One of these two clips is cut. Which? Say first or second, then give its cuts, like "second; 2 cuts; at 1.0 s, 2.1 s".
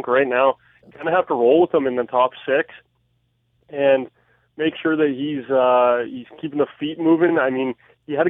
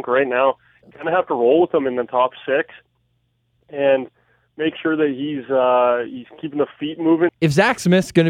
second; 1 cut; at 7.3 s